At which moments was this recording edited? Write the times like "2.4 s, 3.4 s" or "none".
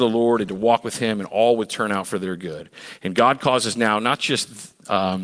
none